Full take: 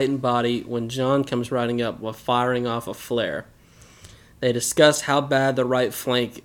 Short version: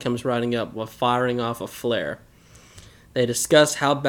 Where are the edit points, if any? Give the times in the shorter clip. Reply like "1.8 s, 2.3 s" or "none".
none